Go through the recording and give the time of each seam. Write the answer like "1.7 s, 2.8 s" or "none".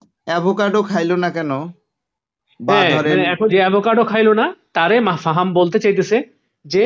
3.5 s

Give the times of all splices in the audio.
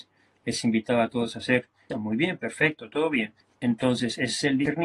1.9 s, 3.5 s

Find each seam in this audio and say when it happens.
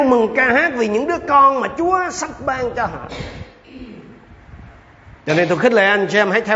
none

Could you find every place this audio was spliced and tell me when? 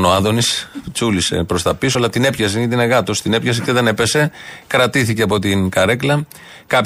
none

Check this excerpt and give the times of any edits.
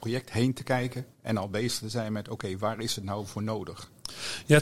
1.1 s

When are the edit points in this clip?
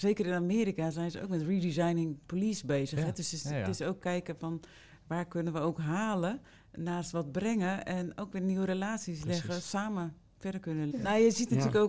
9.6 s, 10.9 s

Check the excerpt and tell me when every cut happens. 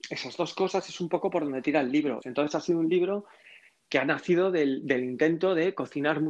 2.2 s

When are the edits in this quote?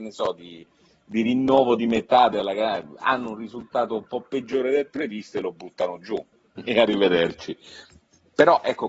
6.5 s

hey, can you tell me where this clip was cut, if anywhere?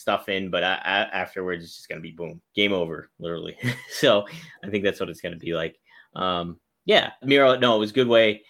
2.4 s, 7.2 s

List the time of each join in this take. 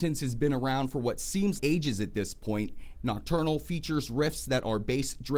1.6 s, 2.9 s

